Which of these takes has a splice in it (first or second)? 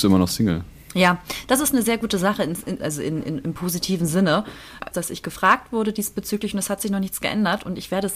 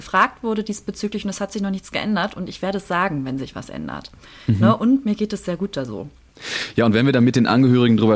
first